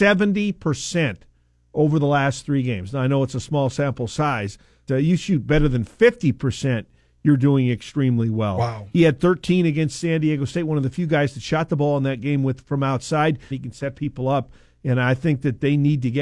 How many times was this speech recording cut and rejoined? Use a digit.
2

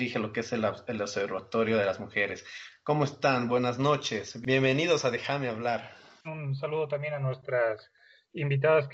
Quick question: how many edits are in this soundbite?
1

